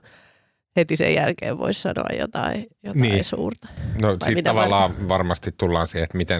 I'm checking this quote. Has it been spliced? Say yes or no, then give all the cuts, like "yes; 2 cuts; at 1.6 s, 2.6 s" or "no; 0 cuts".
no; 0 cuts